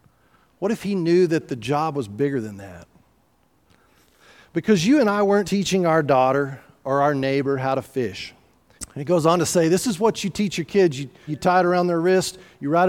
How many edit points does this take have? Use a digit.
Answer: 3